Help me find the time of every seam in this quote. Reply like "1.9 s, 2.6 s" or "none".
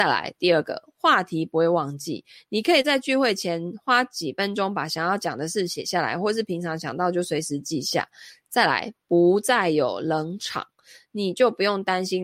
none